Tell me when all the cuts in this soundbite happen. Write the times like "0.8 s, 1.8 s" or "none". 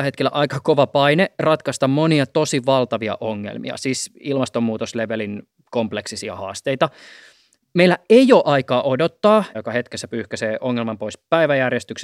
9.5 s